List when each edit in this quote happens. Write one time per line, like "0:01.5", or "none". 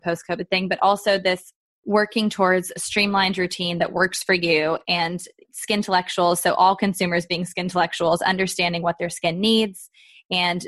0:05.4